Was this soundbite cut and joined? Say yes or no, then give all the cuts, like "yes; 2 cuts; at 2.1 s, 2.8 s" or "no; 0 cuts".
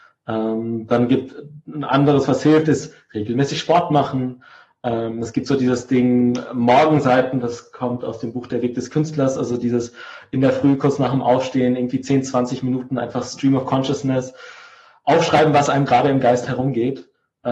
no; 0 cuts